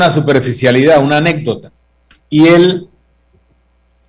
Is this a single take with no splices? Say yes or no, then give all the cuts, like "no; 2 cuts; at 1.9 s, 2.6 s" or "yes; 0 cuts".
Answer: no; 1 cut; at 2.2 s